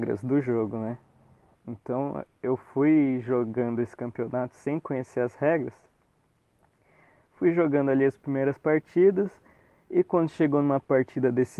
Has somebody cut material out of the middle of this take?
yes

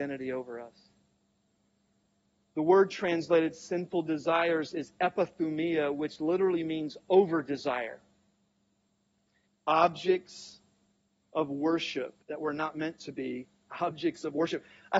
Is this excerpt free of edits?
no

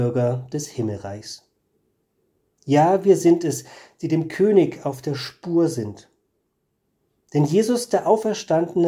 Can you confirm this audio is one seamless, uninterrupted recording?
yes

